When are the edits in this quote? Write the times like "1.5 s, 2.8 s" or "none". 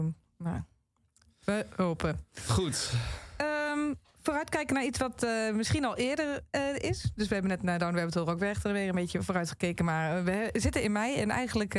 none